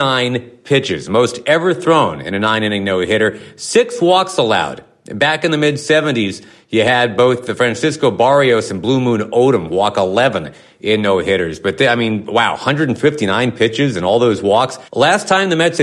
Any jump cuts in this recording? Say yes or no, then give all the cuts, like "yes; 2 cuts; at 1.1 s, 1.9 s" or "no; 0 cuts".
yes; 1 cut; at 14.9 s